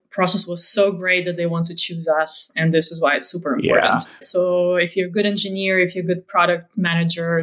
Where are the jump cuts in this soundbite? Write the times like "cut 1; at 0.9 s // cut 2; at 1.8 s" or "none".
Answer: cut 1; at 4.2 s